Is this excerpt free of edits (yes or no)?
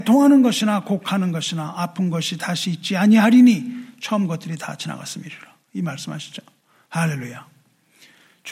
yes